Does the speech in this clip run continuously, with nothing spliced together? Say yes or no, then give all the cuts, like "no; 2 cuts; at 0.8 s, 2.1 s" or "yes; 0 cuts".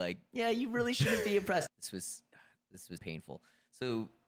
no; 2 cuts; at 1.7 s, 3.0 s